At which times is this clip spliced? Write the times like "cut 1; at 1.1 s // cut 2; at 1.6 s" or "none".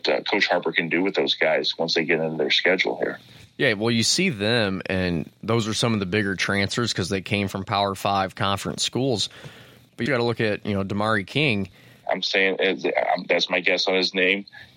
cut 1; at 10.1 s // cut 2; at 12.0 s